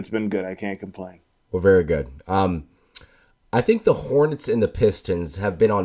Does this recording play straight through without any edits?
yes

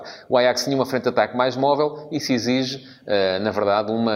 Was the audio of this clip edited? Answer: no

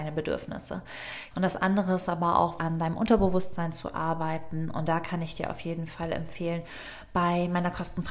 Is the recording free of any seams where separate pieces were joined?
no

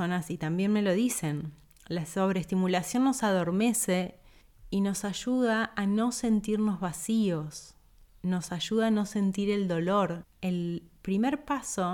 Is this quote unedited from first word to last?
no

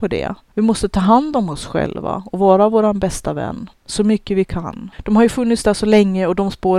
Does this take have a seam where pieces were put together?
yes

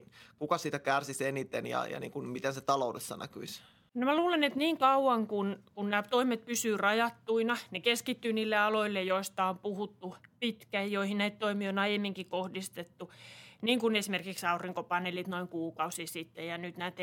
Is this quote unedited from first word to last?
yes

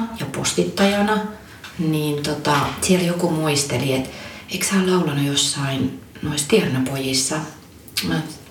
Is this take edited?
no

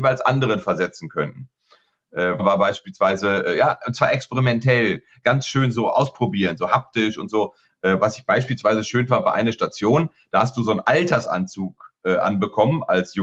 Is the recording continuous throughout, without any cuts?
no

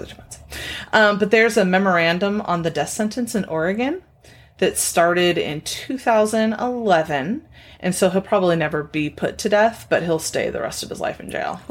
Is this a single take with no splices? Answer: yes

